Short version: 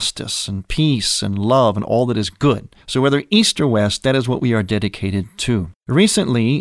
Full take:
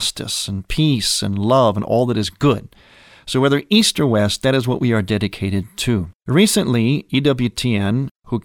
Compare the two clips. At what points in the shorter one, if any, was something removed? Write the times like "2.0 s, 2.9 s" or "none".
2.8 s